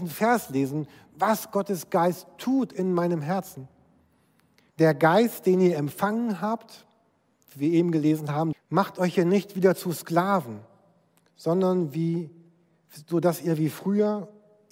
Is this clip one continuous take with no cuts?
no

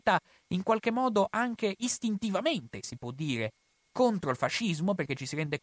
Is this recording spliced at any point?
no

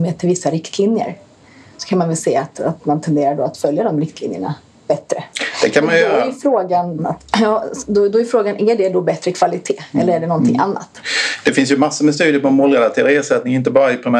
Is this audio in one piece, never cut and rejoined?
no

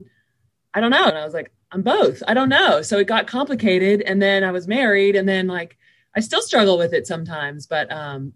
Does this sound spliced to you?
yes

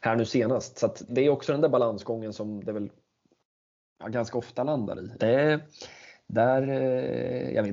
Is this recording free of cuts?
no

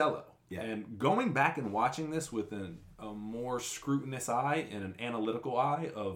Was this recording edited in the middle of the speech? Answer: no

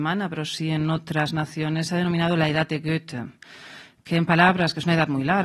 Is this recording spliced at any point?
no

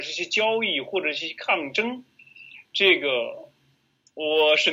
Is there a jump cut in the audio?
no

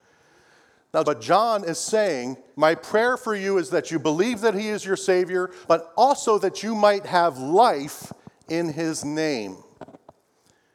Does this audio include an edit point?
yes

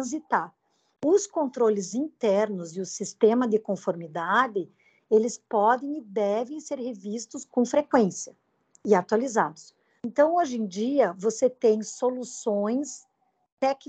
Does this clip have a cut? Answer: yes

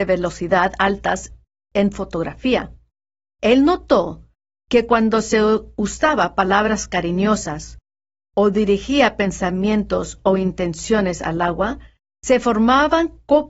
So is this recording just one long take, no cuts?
yes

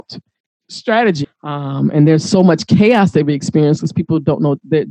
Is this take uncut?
no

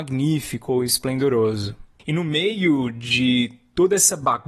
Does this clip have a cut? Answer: yes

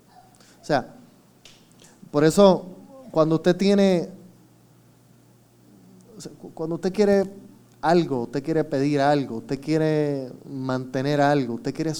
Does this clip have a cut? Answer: no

